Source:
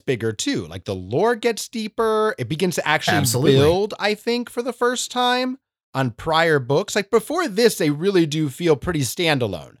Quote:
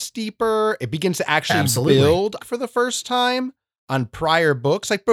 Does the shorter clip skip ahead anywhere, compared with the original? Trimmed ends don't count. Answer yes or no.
yes